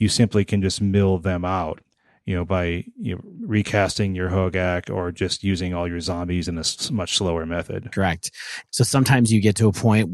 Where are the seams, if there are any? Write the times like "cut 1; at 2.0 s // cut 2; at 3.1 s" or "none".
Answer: cut 1; at 8.7 s